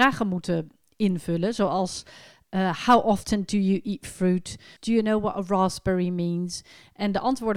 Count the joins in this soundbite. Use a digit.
1